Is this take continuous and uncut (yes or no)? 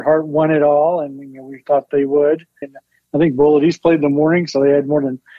no